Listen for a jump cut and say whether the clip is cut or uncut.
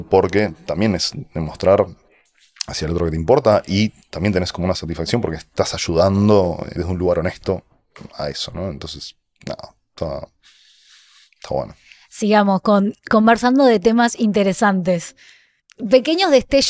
cut